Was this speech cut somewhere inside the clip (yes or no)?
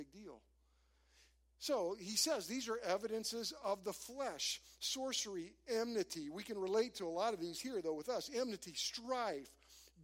no